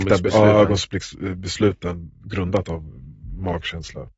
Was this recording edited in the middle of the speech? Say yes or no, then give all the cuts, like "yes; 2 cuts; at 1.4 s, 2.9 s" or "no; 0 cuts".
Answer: no; 0 cuts